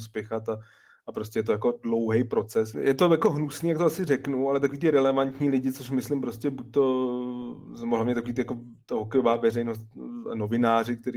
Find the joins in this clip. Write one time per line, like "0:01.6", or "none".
0:02.7